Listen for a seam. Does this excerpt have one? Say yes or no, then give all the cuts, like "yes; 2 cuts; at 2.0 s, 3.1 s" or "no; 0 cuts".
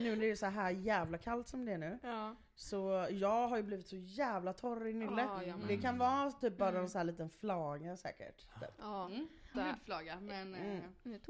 yes; 1 cut; at 9.5 s